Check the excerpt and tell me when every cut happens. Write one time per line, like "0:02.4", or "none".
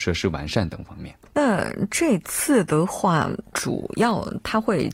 0:01.3
0:03.5